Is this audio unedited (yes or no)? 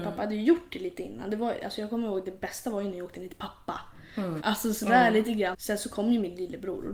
no